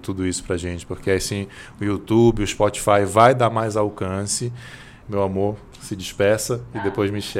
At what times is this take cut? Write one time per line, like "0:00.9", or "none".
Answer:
0:05.0

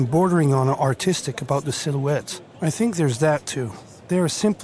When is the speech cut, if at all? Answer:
0:02.5

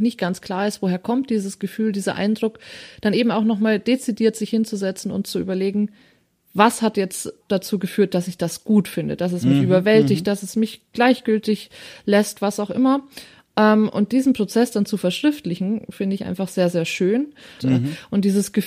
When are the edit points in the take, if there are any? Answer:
0:17.6

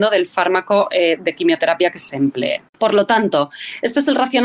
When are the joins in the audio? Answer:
0:02.7

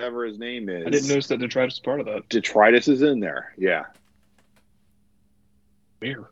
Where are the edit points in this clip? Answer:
none

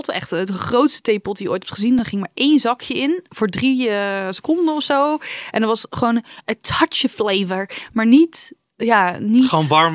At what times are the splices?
none

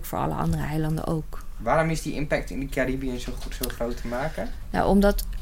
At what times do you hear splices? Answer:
none

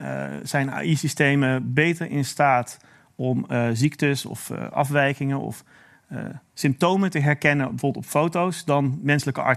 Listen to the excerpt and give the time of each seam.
none

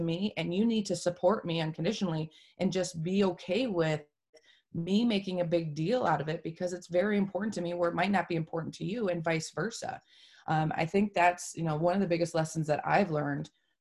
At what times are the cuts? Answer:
none

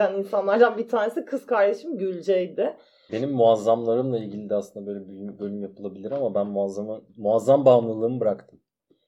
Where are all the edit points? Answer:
0:03.1
0:07.1

